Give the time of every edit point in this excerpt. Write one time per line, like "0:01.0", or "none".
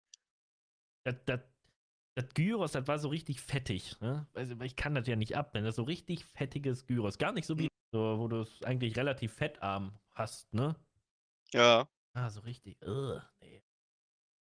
0:07.7